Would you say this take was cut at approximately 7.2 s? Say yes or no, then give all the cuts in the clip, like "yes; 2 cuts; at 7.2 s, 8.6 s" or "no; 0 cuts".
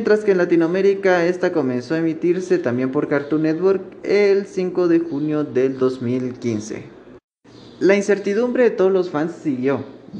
no; 0 cuts